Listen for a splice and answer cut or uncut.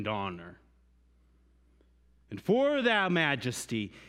uncut